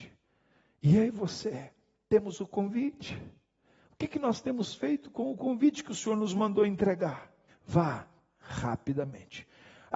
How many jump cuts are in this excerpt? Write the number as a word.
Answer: one